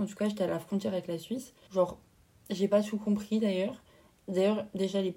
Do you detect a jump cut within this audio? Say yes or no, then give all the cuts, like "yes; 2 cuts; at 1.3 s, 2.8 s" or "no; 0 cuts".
yes; 1 cut; at 1.7 s